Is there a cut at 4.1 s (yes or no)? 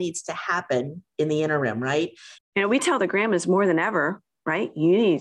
no